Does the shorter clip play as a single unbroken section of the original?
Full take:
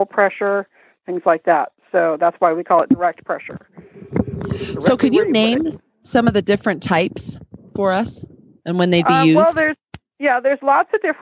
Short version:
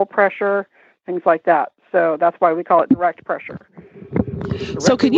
yes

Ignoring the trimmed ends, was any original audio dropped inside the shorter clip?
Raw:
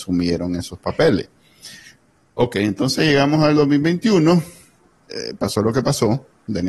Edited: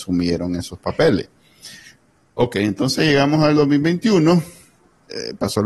no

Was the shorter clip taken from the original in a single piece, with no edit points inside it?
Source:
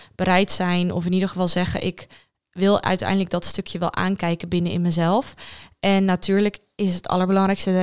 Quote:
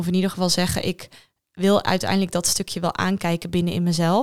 yes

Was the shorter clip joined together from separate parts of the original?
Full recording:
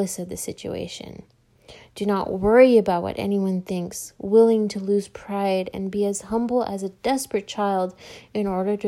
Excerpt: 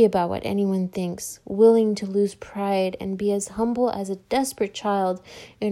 no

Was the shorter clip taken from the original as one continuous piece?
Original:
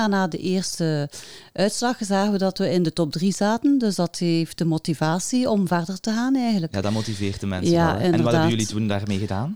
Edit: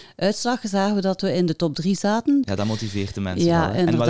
no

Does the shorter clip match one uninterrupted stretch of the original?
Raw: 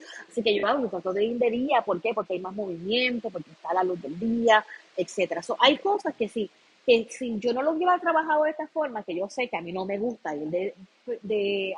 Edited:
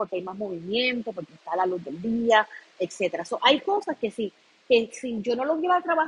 yes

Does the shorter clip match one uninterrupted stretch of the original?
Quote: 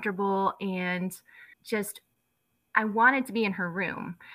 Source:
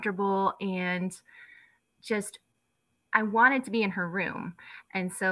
no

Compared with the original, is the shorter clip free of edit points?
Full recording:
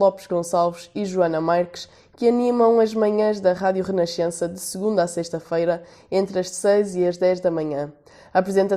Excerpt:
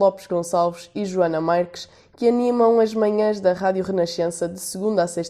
yes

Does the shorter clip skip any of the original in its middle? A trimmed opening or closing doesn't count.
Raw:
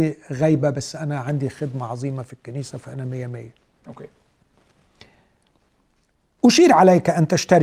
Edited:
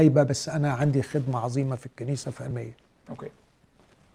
yes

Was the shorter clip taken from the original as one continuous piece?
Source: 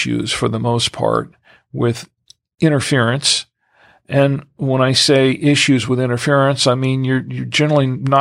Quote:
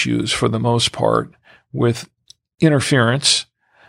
yes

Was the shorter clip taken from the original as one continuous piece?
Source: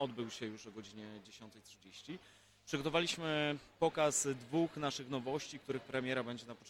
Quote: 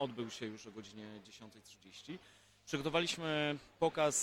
yes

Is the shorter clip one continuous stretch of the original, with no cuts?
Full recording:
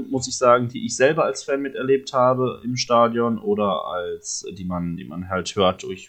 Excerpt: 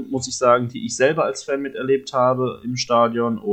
yes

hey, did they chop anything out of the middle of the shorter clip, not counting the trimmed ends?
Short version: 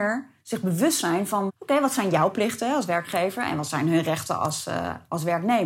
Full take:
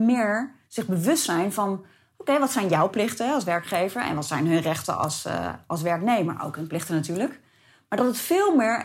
yes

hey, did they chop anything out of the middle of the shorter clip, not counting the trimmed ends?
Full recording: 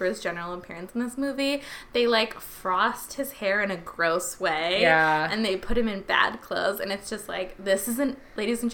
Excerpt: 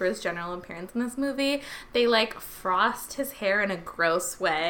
no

